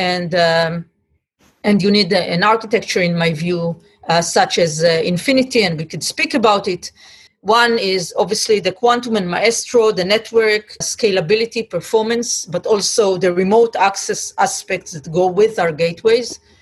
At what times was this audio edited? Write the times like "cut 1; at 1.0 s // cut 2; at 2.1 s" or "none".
cut 1; at 7.3 s // cut 2; at 10.8 s